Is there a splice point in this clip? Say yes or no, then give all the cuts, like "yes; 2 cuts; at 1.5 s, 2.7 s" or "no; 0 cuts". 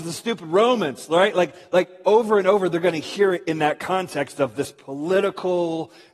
no; 0 cuts